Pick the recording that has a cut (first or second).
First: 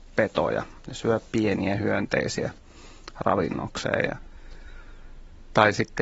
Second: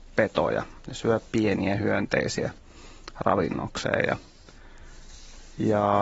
first